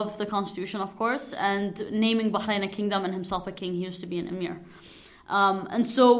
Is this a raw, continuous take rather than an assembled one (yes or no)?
yes